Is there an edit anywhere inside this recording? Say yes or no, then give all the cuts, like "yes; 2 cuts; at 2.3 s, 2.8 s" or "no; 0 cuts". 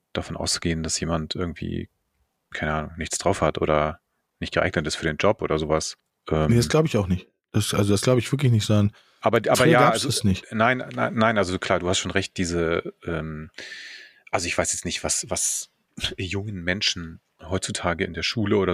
no; 0 cuts